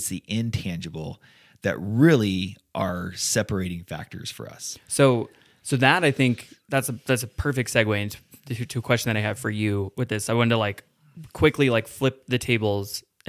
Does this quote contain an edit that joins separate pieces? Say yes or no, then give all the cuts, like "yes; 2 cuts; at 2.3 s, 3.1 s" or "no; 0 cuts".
no; 0 cuts